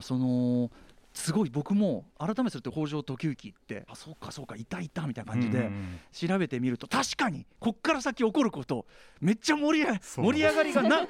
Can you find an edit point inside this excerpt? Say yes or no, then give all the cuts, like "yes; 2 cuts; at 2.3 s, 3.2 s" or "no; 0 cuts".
yes; 1 cut; at 3.9 s